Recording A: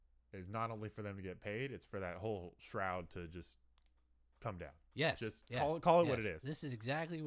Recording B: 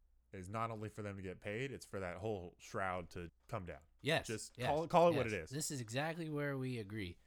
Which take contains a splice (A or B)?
B